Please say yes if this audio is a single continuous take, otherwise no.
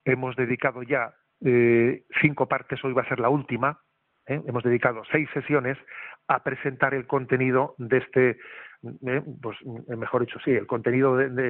yes